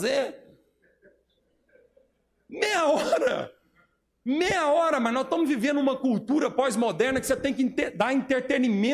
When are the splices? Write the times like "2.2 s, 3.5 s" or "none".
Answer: none